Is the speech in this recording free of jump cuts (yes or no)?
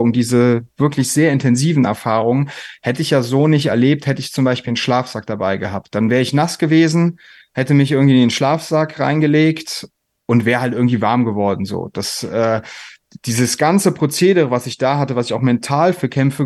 yes